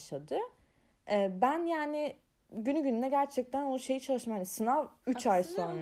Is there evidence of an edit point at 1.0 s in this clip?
no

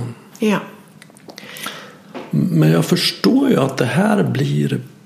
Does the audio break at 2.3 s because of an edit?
no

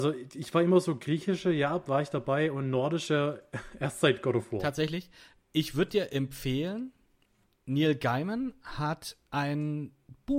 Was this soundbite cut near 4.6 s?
no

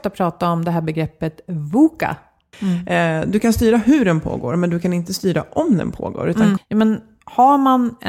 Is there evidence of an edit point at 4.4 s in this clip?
no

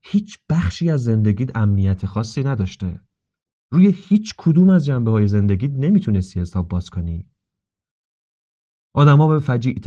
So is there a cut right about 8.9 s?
no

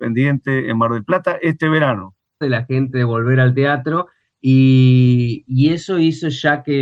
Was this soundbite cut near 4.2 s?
no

